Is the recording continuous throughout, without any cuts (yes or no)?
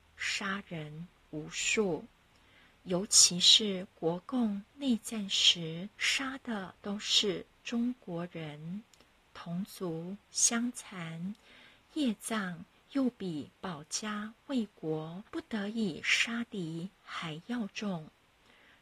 no